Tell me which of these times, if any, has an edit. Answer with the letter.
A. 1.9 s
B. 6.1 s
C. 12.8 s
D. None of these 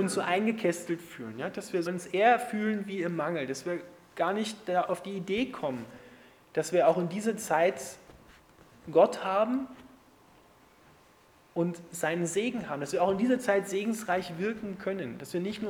A